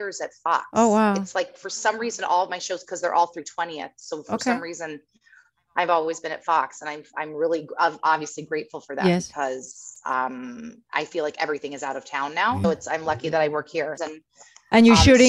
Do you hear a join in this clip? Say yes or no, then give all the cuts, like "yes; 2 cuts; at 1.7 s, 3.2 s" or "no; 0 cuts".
yes; 2 cuts; at 12.6 s, 14.0 s